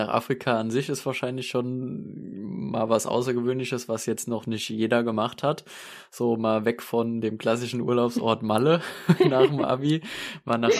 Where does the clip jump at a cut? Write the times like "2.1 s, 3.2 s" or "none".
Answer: none